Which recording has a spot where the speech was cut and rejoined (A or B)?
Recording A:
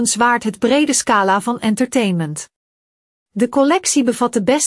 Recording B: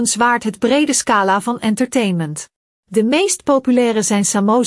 B